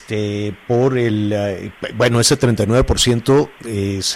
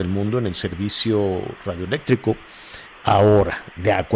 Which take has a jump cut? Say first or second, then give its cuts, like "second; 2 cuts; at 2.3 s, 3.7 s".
second; 1 cut; at 2.9 s